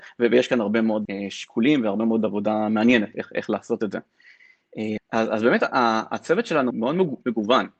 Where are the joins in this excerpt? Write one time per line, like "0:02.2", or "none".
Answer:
0:01.1
0:05.0
0:06.7